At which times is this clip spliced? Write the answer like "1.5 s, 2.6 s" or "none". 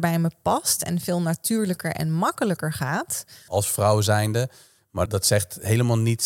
3.5 s, 5.1 s